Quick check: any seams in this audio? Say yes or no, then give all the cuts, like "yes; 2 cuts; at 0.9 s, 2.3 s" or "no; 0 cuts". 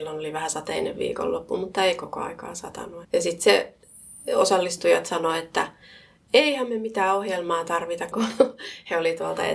yes; 2 cuts; at 3.0 s, 8.1 s